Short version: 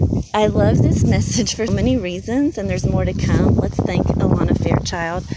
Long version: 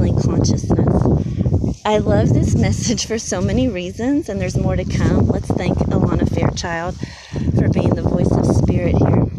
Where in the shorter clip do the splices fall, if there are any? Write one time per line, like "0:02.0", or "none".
0:01.7